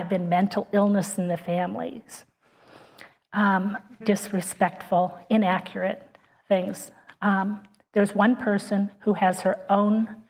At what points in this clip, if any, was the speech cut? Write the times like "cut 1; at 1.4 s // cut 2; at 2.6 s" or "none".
cut 1; at 4.0 s